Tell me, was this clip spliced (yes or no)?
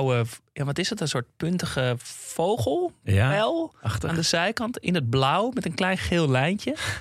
no